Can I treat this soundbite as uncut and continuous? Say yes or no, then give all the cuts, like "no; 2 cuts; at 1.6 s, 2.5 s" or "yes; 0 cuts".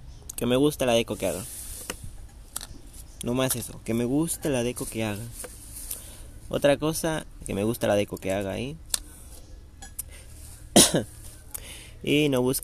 no; 1 cut; at 7.4 s